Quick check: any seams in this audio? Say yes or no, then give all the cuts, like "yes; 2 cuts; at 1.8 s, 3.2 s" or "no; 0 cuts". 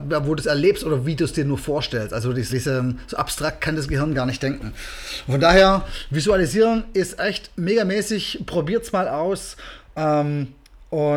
yes; 1 cut; at 2.5 s